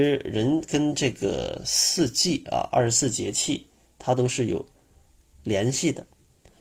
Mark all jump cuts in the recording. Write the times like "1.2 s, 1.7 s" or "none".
none